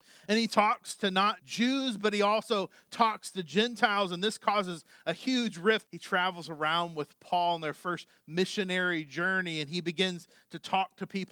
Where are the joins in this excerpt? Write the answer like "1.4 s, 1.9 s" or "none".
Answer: 1.4 s, 5.8 s